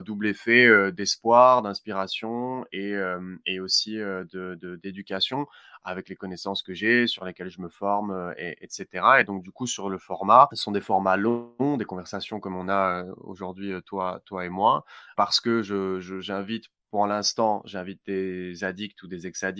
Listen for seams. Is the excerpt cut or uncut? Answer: uncut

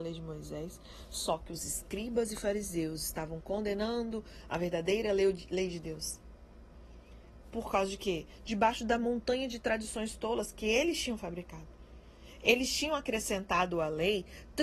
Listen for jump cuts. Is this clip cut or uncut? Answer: uncut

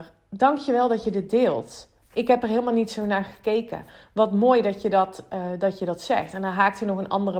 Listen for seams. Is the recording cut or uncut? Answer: uncut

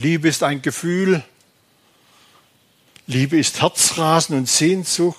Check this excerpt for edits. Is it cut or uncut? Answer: uncut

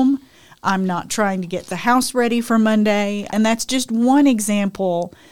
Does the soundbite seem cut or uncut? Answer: cut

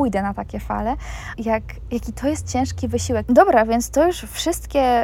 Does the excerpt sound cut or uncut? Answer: cut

